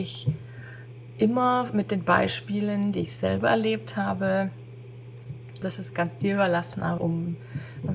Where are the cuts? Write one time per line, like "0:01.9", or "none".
0:05.6
0:07.0